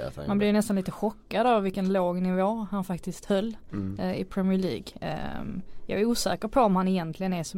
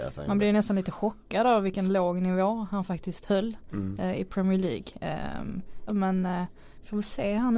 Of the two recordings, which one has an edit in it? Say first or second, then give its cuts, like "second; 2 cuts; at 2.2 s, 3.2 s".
second; 1 cut; at 5.9 s